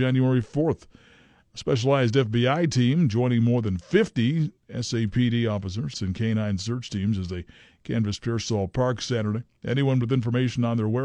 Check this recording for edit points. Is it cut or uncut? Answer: cut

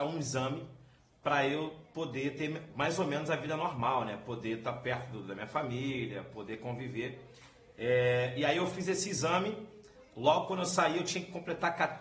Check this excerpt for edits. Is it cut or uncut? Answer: uncut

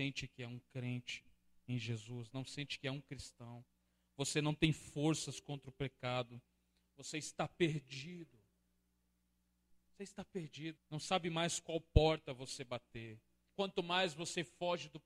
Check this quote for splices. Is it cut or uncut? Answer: cut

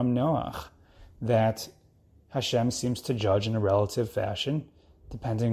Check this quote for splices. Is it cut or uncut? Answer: uncut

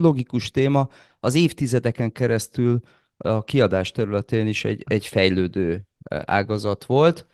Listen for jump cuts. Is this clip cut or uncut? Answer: uncut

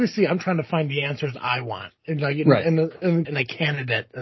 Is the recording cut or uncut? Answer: cut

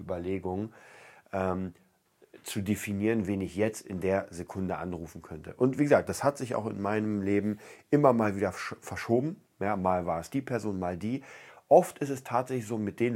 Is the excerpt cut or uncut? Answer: uncut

